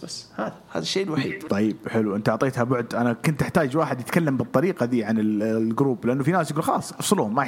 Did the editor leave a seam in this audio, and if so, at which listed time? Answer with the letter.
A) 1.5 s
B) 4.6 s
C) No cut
A